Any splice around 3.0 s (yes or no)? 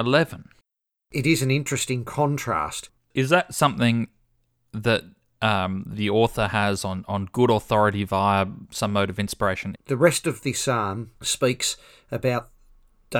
yes